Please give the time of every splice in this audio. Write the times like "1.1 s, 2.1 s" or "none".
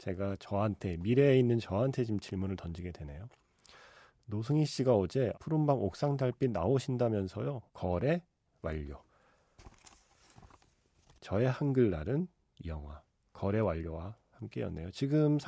5.3 s, 7.7 s

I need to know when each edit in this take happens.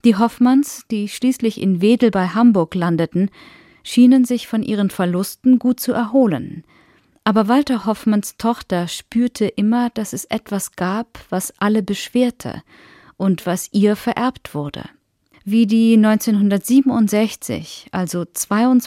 15.3 s

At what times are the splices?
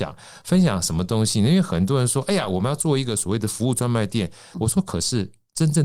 4.5 s

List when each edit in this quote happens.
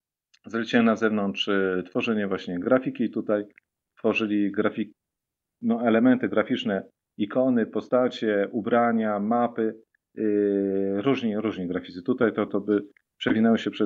12.5 s

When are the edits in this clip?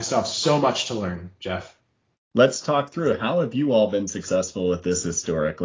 2.1 s

